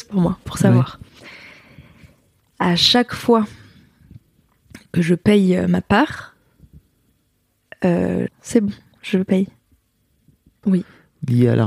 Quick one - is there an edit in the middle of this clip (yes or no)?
yes